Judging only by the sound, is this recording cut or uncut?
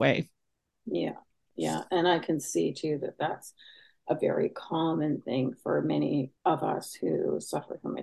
cut